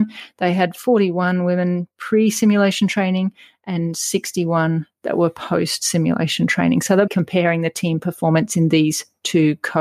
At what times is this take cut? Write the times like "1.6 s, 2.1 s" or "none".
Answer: 7.1 s